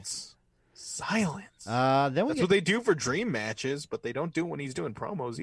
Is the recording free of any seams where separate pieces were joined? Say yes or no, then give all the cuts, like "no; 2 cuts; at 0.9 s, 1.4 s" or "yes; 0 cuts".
yes; 0 cuts